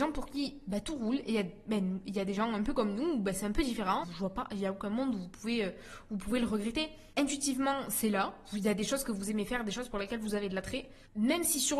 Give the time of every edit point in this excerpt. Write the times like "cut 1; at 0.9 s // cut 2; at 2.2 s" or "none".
cut 1; at 4.0 s